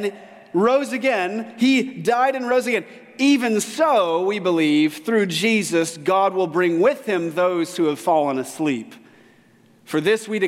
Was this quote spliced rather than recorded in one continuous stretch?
no; 0 cuts

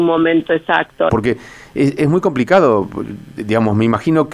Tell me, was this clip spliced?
yes; 1 cut; at 1.1 s

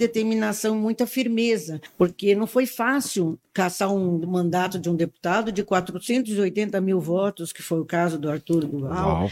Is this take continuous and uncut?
yes; 0 cuts

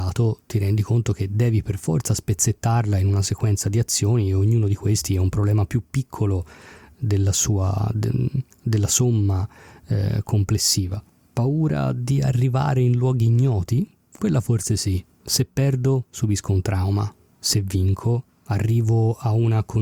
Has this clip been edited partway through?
no; 0 cuts

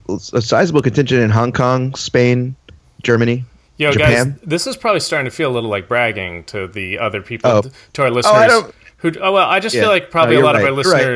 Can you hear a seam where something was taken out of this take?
no; 0 cuts

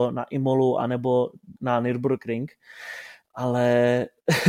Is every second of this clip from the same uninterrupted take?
no; 1 cut; at 1.6 s

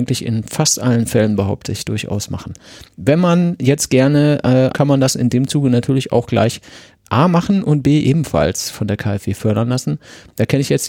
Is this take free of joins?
no; 1 cut; at 4.7 s

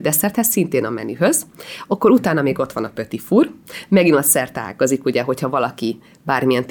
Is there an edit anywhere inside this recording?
no; 0 cuts

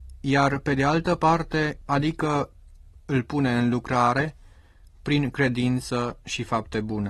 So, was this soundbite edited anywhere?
yes; 1 cut; at 1.8 s

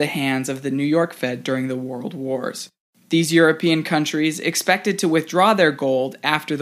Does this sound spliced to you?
no; 0 cuts

